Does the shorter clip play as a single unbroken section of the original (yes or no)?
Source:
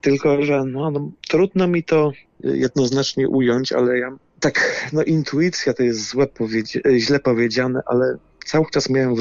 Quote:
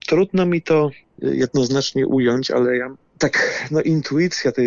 yes